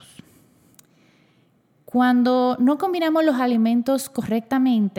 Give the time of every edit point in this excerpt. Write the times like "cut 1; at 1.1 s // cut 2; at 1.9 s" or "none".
none